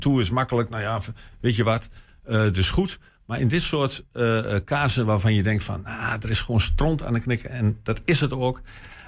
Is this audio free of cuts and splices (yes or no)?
yes